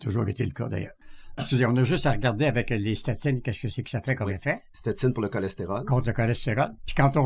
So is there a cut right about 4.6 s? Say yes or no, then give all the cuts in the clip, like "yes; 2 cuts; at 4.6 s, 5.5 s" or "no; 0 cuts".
no; 0 cuts